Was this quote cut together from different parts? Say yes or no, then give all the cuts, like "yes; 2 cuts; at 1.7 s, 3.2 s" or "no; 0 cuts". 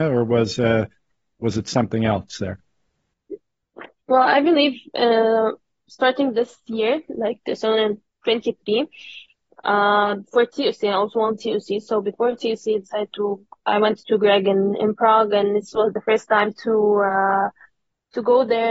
no; 0 cuts